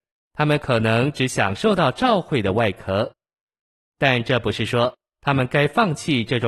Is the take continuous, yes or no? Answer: yes